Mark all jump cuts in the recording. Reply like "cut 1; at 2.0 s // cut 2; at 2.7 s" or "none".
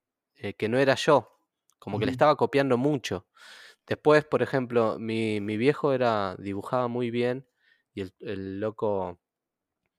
none